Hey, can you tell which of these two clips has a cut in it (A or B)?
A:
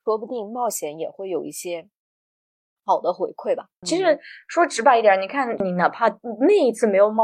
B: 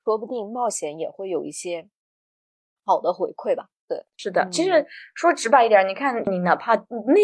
A